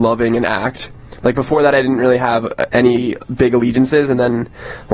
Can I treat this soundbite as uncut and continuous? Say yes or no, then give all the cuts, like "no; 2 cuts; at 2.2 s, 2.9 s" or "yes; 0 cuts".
yes; 0 cuts